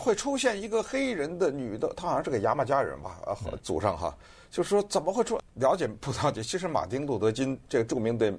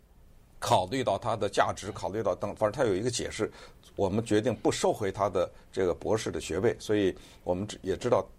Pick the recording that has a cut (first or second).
first